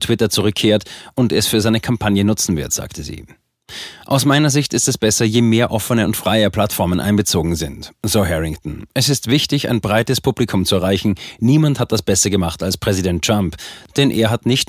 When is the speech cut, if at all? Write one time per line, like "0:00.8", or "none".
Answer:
none